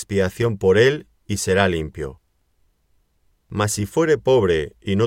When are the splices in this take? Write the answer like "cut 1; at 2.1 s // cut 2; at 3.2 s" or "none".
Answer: none